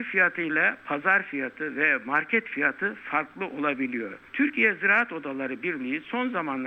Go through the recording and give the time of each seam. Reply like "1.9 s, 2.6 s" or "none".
none